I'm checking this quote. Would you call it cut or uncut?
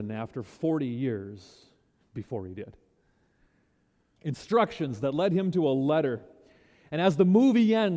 cut